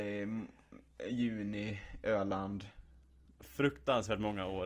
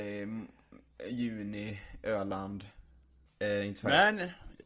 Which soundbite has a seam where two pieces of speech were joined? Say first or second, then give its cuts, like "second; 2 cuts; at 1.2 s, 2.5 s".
second; 1 cut; at 3.3 s